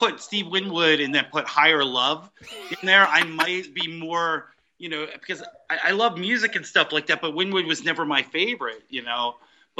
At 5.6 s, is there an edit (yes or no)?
no